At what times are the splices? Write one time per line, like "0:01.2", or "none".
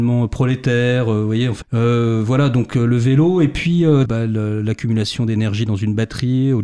0:01.6
0:04.1